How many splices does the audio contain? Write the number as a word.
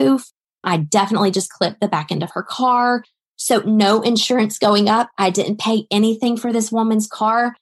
zero